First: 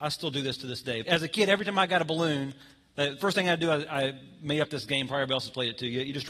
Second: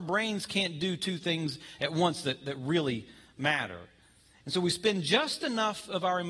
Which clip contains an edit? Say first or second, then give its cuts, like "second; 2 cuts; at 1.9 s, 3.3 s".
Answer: first; 1 cut; at 1.0 s